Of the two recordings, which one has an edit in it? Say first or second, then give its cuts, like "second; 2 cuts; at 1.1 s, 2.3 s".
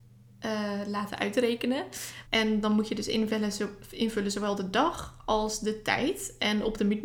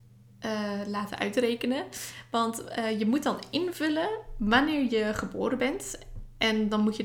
first; 1 cut; at 2.3 s